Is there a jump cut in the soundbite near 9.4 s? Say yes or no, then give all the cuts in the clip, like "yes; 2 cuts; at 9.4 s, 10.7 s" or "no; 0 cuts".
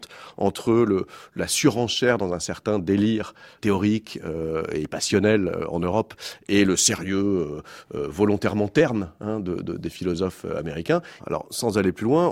no; 2 cuts; at 3.6 s, 11.2 s